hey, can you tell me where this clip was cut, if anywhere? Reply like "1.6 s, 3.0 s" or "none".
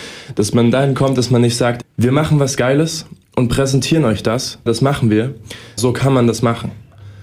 1.8 s, 4.7 s, 5.8 s